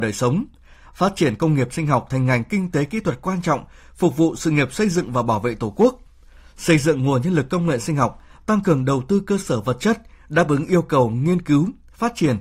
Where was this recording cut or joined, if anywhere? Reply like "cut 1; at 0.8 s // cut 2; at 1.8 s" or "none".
none